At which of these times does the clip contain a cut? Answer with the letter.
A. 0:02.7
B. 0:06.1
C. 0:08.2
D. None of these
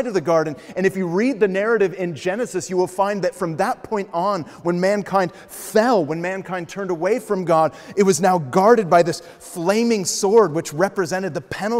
D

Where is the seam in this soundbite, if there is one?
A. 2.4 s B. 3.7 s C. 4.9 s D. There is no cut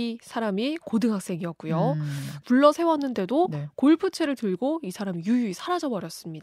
A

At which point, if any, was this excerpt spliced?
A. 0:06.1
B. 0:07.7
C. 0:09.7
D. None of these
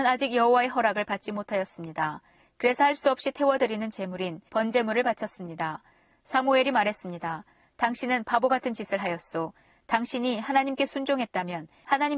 C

